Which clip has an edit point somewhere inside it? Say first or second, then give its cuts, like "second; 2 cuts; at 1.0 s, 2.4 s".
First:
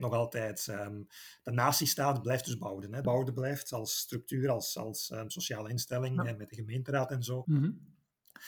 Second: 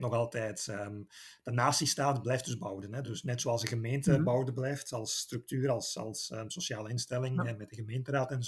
first; 2 cuts; at 3.0 s, 7.4 s